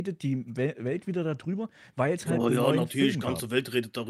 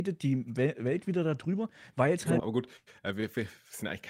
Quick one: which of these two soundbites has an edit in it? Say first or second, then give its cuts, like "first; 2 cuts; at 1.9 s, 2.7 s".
second; 1 cut; at 2.4 s